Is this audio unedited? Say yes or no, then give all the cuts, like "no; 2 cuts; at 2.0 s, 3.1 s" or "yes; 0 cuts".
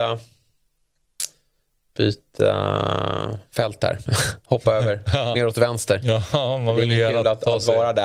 yes; 0 cuts